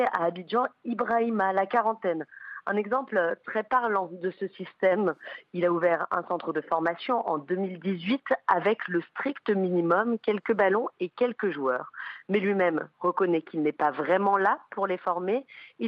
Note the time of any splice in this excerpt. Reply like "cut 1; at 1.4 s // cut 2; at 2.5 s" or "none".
none